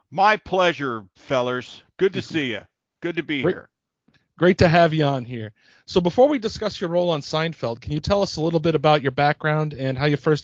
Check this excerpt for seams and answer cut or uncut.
uncut